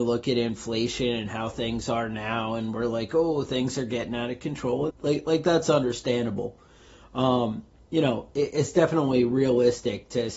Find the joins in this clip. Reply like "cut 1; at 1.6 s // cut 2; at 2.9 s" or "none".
cut 1; at 4.9 s